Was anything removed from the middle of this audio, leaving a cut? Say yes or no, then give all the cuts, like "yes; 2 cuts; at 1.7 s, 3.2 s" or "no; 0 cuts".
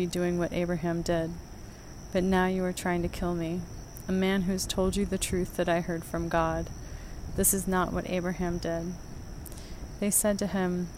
yes; 1 cut; at 10.0 s